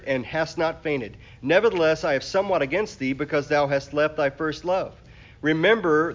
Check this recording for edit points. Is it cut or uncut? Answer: uncut